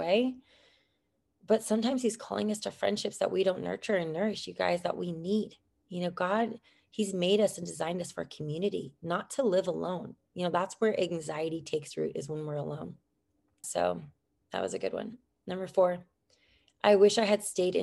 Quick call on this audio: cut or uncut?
cut